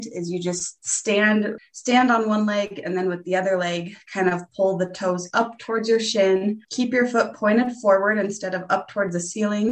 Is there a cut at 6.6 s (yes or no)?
yes